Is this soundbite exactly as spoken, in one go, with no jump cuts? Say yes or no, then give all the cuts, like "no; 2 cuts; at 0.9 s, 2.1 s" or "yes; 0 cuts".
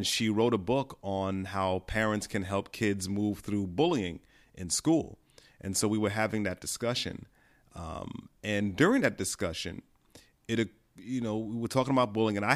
yes; 0 cuts